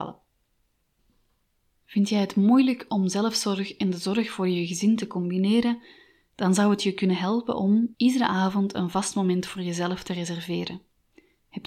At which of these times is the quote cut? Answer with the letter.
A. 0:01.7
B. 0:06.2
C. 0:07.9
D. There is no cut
C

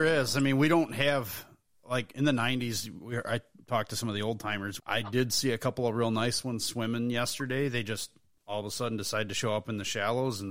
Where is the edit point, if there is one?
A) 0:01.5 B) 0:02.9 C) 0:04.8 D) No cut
C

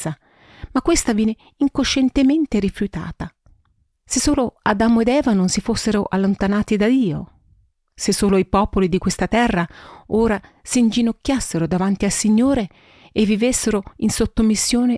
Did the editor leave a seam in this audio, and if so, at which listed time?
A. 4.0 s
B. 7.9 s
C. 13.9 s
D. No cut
A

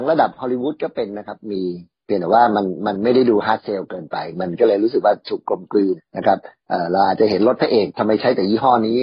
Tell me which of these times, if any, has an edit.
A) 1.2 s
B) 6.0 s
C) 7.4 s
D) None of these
B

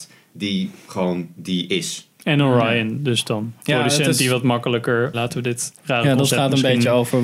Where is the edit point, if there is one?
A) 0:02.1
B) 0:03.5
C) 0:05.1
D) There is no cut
C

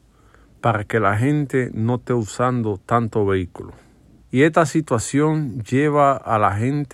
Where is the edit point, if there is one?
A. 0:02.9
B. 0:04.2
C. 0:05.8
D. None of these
B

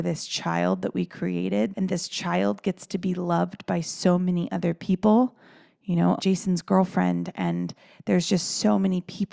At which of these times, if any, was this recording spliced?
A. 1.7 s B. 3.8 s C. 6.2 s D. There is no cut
C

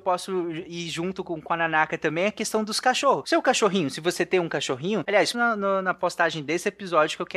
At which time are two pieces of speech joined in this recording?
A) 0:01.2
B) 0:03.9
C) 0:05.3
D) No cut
C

